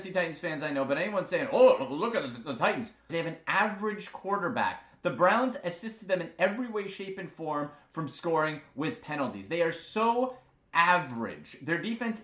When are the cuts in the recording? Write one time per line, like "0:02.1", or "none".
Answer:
0:03.1